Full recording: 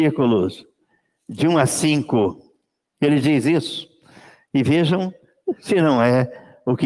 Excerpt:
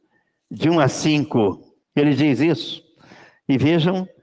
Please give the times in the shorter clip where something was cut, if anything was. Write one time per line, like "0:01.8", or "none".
0:01.8